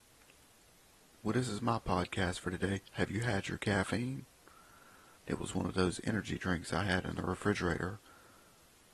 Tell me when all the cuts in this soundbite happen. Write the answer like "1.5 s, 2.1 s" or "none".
5.2 s